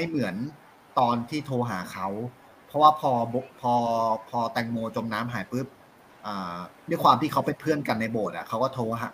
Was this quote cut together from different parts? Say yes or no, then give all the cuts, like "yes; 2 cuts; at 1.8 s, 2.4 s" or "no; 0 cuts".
yes; 2 cuts; at 5.5 s, 6.8 s